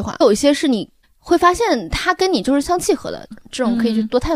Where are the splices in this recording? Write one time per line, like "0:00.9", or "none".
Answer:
0:02.6